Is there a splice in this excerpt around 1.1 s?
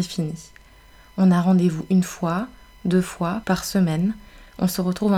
no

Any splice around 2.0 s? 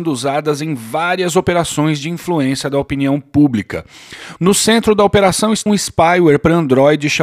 no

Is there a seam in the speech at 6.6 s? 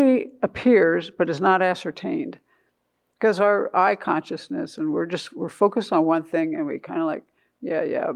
no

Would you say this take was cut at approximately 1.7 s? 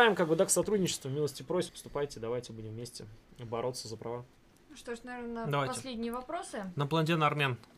yes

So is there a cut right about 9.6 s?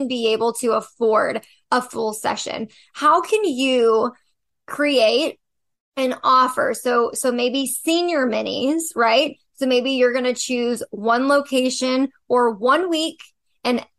no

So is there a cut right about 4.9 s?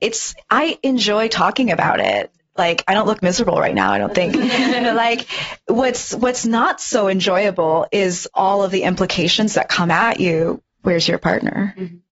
no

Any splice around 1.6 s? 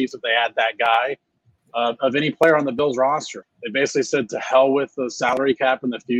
yes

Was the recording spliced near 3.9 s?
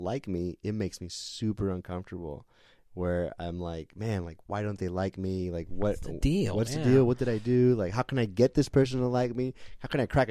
no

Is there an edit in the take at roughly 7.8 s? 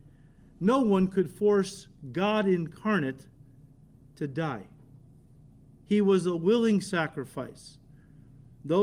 no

